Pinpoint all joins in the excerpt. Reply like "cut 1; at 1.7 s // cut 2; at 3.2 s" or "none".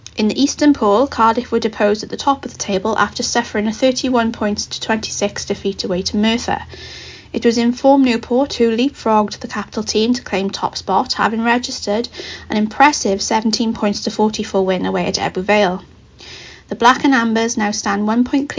none